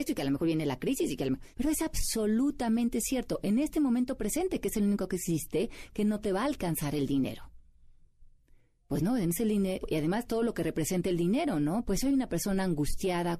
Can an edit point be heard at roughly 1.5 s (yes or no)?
yes